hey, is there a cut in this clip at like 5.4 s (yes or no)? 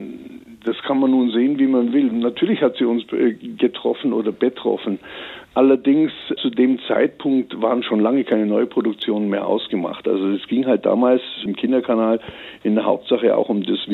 no